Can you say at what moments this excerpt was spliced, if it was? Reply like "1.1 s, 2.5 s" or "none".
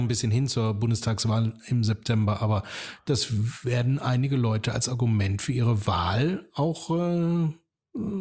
none